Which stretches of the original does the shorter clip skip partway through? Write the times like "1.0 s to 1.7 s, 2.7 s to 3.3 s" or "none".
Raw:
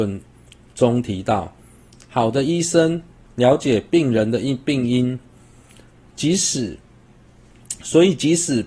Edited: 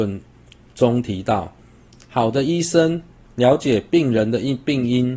none